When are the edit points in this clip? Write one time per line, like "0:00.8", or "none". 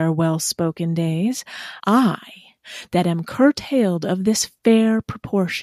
0:01.8